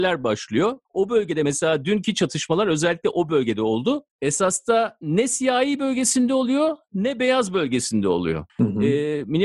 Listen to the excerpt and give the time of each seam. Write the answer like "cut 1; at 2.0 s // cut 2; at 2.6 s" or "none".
cut 1; at 4.1 s // cut 2; at 8.5 s